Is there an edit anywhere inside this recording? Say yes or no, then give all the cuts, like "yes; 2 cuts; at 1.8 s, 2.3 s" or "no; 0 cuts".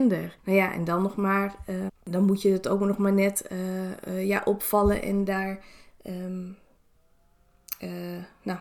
yes; 1 cut; at 1.9 s